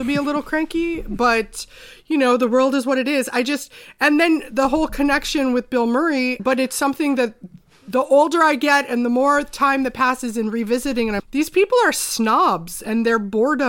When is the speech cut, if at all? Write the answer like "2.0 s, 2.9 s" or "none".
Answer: 6.4 s, 11.2 s